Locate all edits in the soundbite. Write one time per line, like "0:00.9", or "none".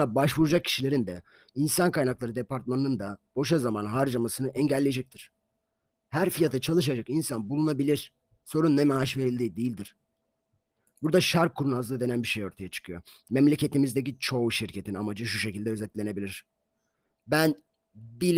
none